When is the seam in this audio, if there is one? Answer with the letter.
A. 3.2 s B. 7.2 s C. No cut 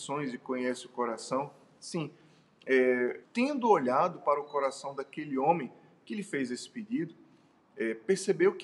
A